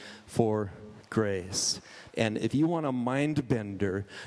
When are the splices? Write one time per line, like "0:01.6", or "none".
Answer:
0:02.1